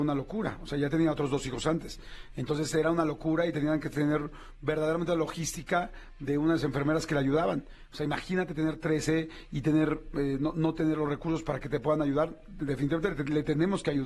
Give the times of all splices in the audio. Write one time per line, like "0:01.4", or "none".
none

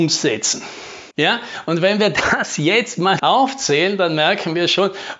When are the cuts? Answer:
0:01.1
0:03.2

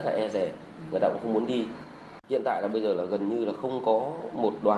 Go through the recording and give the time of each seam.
0:02.2

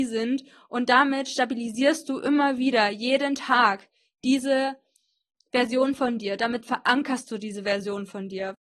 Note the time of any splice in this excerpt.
none

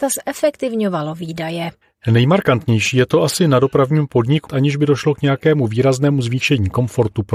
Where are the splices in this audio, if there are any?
0:04.5

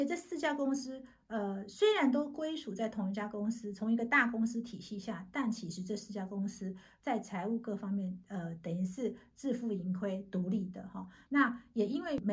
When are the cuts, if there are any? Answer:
0:11.3

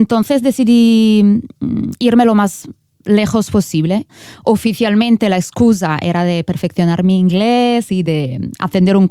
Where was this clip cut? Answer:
0:08.0

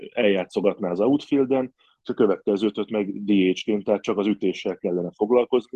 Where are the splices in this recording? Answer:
none

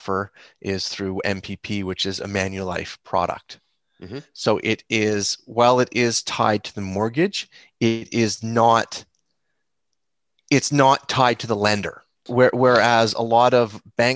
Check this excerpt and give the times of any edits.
0:12.3

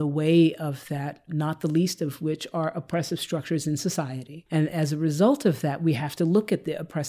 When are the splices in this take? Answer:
0:01.3

